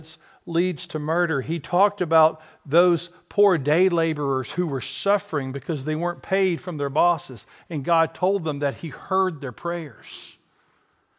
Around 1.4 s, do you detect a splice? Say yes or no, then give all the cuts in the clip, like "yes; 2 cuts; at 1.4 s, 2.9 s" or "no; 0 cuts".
no; 0 cuts